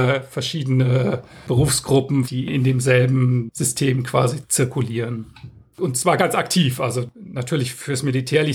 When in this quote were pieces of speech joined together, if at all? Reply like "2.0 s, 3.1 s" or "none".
2.2 s, 5.7 s